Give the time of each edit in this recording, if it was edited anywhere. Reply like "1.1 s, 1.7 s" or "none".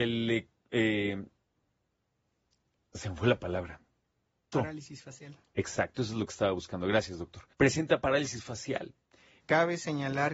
4.5 s, 7.5 s, 9.4 s